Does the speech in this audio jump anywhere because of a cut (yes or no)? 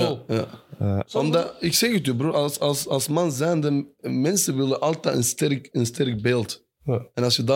no